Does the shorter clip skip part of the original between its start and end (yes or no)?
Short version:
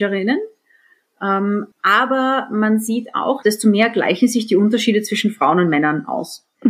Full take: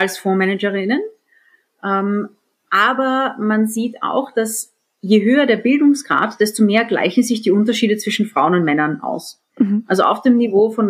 yes